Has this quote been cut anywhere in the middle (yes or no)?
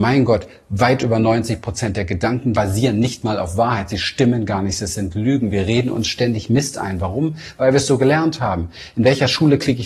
yes